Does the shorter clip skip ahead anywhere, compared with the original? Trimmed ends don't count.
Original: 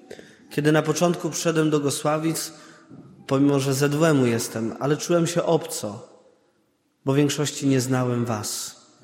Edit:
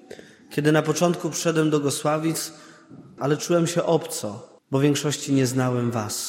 yes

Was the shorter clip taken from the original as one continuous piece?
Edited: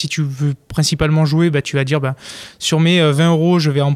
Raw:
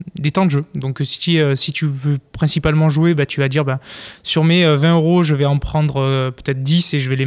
yes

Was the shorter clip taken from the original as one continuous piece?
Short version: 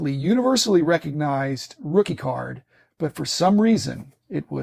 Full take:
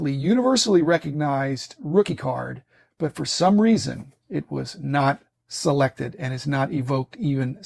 yes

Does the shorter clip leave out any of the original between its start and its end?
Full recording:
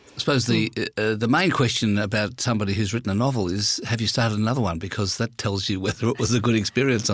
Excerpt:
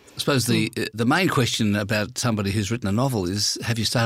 yes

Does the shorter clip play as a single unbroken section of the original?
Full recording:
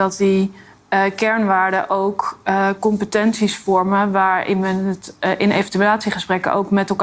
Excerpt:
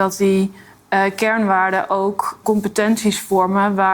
no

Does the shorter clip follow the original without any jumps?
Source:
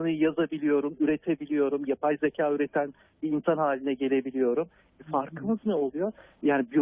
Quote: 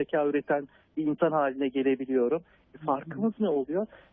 yes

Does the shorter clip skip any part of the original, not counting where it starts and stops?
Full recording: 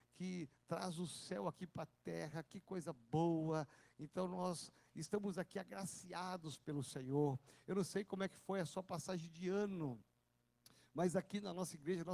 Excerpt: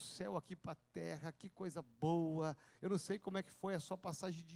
yes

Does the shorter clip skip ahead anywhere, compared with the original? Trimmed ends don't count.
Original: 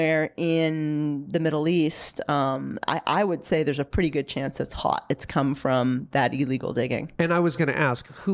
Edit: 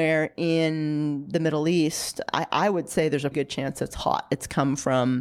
yes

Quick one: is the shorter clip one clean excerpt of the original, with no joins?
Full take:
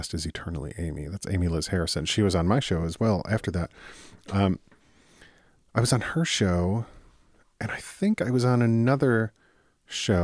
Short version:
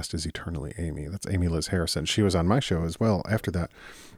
yes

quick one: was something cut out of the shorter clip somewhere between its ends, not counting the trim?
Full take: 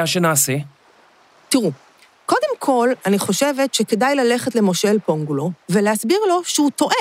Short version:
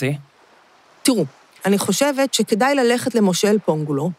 yes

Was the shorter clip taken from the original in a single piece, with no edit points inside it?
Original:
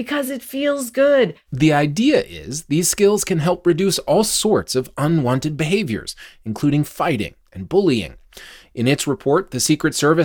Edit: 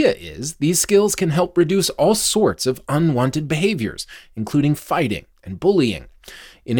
yes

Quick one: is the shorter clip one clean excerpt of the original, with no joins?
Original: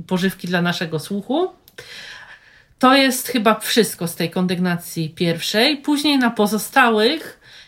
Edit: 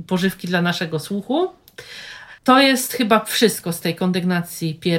no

